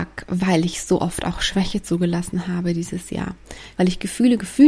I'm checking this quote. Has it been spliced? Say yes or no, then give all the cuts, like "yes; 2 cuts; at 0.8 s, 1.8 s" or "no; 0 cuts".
yes; 1 cut; at 3.7 s